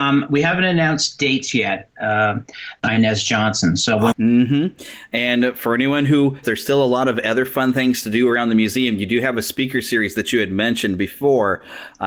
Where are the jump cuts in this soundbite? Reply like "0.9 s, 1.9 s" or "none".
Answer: 2.8 s, 4.1 s, 6.4 s